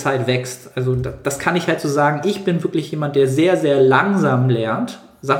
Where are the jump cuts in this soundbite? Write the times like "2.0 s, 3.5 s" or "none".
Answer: none